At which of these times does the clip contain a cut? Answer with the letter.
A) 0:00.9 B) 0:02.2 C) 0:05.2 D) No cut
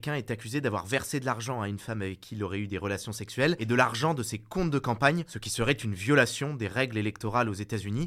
D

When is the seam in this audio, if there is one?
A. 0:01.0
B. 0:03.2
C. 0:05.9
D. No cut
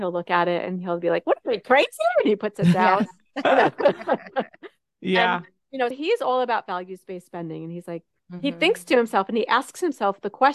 C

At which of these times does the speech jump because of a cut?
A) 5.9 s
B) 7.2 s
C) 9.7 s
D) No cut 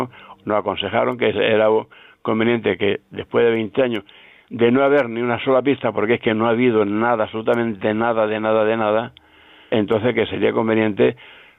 C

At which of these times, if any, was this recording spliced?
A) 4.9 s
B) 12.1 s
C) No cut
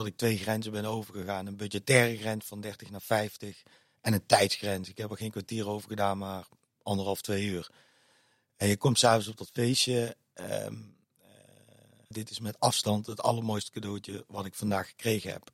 B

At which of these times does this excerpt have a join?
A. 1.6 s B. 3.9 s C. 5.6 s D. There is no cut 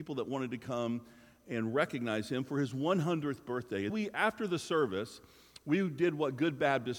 B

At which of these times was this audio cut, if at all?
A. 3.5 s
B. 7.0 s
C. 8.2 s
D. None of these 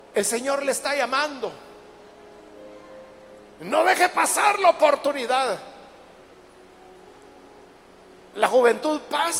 D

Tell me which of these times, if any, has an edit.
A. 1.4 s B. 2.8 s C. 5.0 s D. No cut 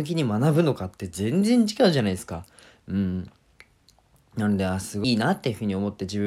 C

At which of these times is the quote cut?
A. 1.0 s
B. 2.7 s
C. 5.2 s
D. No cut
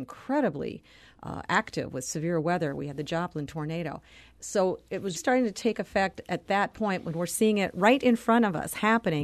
C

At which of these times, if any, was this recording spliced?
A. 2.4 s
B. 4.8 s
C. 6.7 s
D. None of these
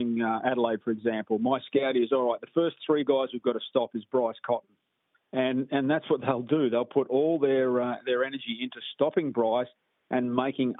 D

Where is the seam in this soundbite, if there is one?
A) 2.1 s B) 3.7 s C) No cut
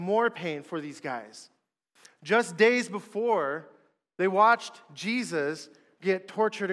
C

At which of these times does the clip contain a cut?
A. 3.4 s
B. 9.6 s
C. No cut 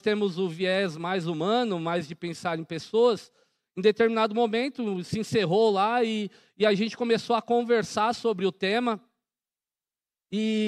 C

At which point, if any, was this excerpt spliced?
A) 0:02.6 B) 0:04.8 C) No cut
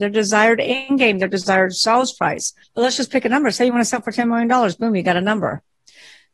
A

